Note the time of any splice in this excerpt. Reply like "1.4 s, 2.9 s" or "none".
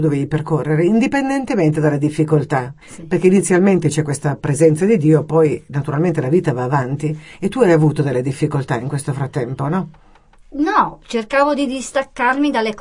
2.8 s